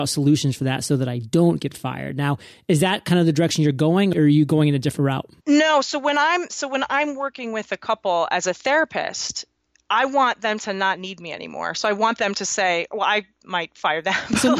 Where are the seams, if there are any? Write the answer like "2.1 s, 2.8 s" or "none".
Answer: 5.4 s